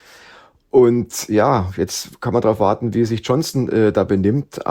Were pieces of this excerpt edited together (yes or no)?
no